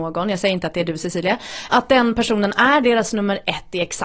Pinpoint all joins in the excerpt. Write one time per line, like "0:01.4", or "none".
0:01.7